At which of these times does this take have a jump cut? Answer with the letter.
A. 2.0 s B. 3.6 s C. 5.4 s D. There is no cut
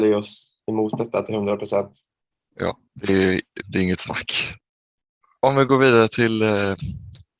B